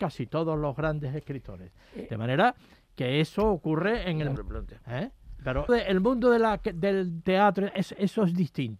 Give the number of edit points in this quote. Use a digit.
2